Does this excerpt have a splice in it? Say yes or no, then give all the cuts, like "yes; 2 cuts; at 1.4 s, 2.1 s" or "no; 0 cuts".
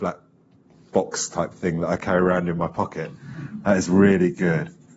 no; 0 cuts